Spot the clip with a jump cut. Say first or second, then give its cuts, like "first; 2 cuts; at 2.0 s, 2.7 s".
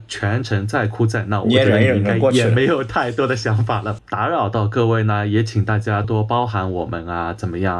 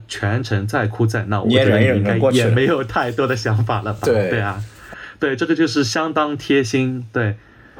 first; 2 cuts; at 4.0 s, 6.0 s